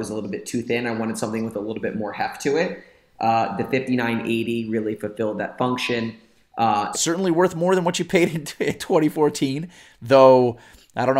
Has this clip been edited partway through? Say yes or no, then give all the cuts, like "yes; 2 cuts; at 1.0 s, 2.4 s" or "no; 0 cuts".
yes; 1 cut; at 6.9 s